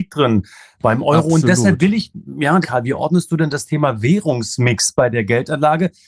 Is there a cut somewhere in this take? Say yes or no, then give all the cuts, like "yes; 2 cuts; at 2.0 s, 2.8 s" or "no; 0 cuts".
yes; 1 cut; at 2.6 s